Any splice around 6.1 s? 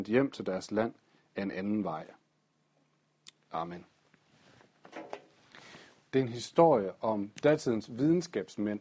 yes; 1 cut; at 6.1 s

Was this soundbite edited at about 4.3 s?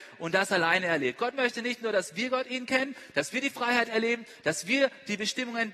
no; 0 cuts

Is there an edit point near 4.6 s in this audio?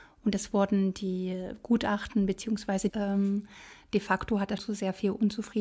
yes; 2 cuts; at 2.9 s, 4.6 s

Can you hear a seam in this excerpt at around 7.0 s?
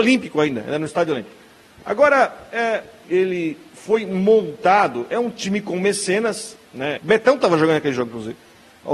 yes; 2 cuts; at 3.0 s, 7.0 s

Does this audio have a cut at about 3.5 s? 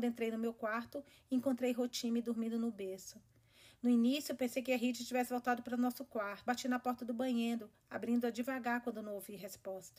no; 1 cut; at 6.5 s

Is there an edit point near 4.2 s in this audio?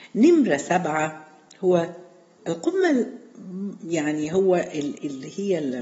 no; 1 cut; at 2.4 s

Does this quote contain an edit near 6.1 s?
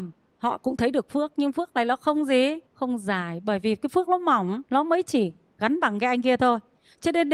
no; 2 cuts; at 2.7 s, 4.7 s

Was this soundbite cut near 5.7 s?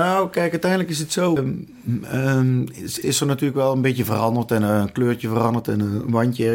no; 2 cuts; at 1.4 s, 3.0 s

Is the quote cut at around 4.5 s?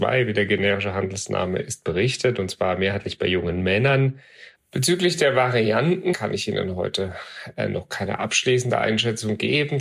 yes; 2 cuts; at 4.5 s, 6.1 s

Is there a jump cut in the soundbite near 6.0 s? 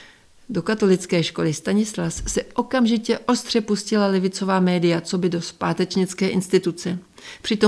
no; 0 cuts

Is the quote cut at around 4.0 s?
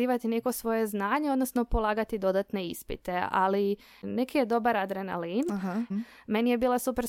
yes; 2 cuts; at 4.0 s, 5.9 s

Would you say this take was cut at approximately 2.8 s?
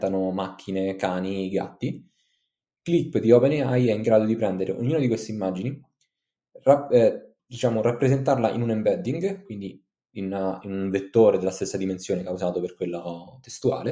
no; 1 cut; at 7.4 s

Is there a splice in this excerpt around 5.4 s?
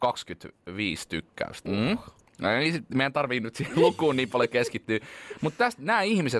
no; 1 cut; at 1.7 s

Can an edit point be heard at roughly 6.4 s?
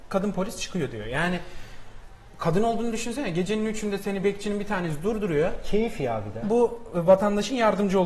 yes; 1 cut; at 6.4 s

